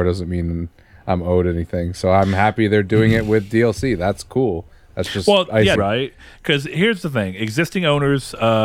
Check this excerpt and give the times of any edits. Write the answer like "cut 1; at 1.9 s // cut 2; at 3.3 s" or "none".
cut 1; at 5.8 s